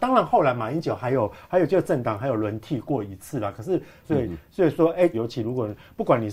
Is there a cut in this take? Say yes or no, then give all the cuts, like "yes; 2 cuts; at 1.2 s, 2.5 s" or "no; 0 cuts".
yes; 2 cuts; at 4.0 s, 5.1 s